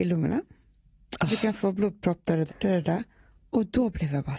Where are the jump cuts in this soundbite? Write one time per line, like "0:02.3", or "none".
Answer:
0:02.5